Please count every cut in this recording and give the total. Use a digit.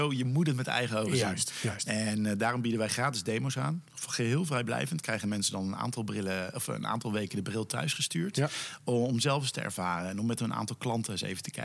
0